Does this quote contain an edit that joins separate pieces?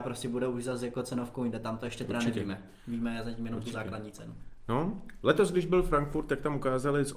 no; 0 cuts

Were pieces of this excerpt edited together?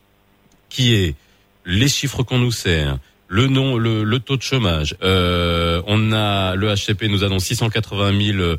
yes; 1 cut; at 5.0 s

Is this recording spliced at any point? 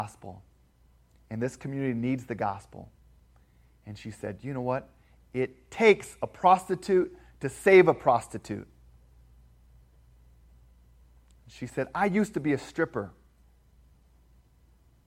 no; 0 cuts

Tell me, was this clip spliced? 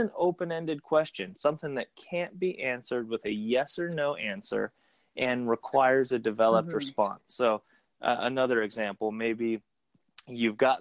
no; 0 cuts

